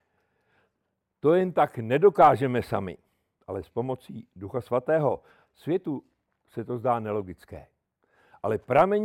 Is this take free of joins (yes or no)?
no